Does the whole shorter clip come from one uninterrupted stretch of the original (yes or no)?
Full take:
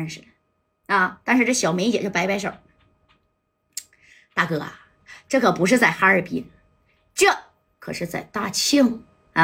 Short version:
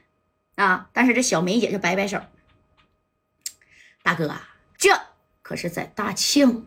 no